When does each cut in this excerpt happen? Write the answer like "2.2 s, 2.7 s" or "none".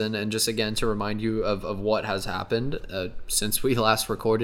none